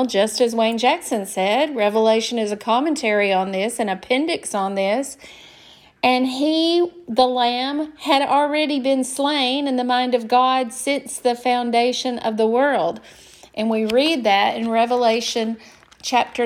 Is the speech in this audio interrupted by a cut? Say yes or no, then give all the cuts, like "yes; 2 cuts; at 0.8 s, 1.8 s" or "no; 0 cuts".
no; 0 cuts